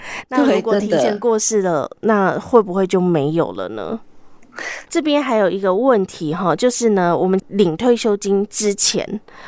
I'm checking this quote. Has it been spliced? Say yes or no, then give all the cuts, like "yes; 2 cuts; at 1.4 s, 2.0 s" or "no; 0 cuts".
yes; 1 cut; at 4.9 s